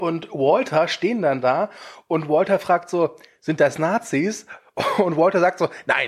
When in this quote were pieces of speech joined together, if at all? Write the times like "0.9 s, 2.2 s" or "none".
none